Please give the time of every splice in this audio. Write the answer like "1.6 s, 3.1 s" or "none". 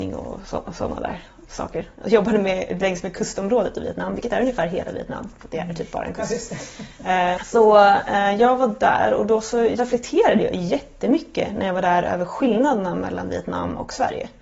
7.4 s